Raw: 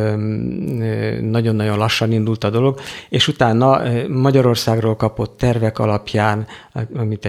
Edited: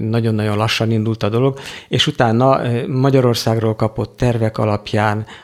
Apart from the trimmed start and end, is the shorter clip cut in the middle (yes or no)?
no